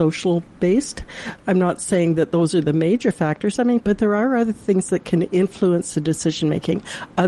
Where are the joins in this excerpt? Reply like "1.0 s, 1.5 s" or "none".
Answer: 3.8 s